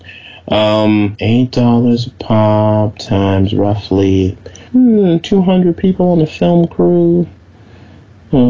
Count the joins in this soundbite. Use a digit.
2